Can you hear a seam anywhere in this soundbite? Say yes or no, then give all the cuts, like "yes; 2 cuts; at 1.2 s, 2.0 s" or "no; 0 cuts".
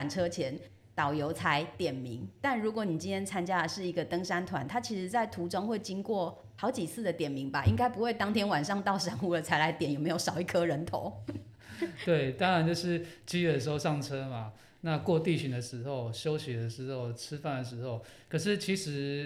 no; 0 cuts